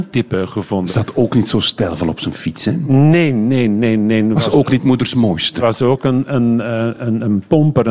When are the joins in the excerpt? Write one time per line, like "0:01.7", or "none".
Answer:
none